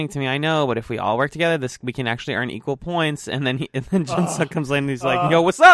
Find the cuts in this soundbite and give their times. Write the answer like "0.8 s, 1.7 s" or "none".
none